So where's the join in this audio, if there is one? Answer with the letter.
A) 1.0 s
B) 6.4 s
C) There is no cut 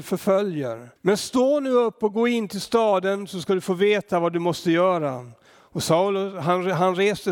A